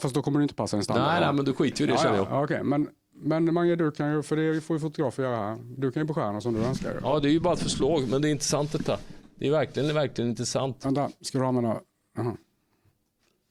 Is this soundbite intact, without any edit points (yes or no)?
yes